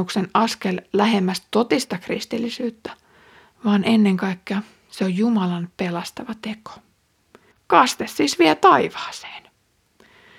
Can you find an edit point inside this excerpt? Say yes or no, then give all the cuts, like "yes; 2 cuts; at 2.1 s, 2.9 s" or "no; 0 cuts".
yes; 1 cut; at 7.5 s